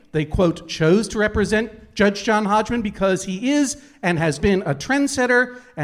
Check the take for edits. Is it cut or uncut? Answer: cut